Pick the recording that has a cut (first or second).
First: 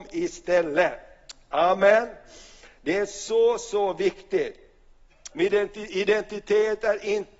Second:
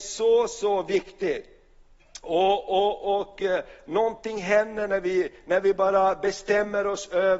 first